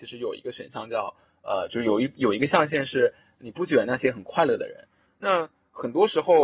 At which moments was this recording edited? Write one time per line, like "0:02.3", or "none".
0:05.1